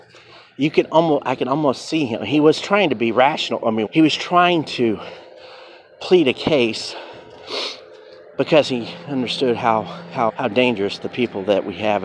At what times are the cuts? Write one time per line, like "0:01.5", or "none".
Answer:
0:03.9
0:10.3